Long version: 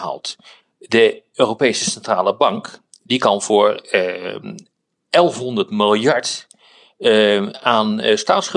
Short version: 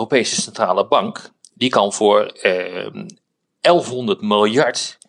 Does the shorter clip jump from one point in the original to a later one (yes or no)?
no